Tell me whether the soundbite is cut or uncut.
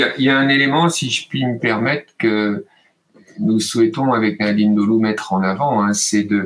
uncut